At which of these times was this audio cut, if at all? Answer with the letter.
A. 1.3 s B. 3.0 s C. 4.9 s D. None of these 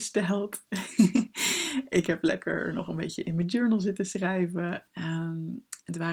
C